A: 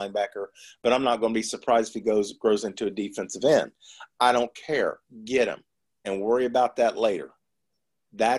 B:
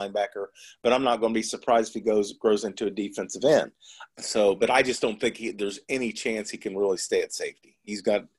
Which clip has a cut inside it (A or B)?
B